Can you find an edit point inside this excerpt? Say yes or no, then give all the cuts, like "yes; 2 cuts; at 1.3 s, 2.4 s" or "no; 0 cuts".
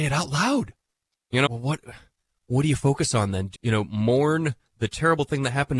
yes; 2 cuts; at 1.5 s, 3.5 s